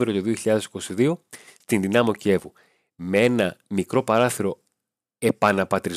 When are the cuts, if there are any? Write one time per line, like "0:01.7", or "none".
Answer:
none